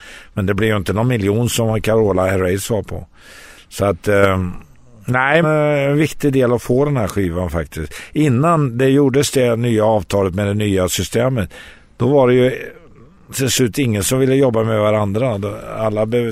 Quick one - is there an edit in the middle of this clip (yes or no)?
yes